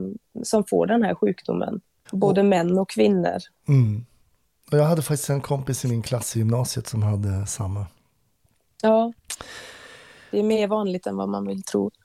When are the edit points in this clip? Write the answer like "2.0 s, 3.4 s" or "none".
2.1 s